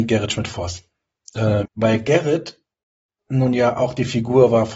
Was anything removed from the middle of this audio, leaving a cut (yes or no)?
yes